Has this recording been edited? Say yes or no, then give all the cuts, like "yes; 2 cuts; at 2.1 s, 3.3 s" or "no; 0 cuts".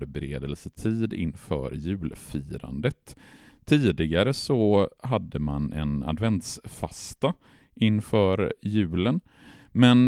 no; 0 cuts